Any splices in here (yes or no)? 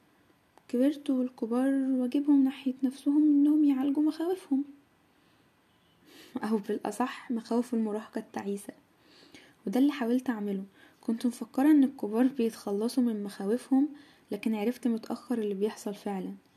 no